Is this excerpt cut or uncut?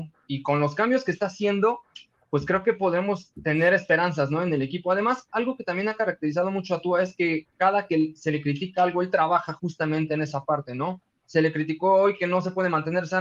cut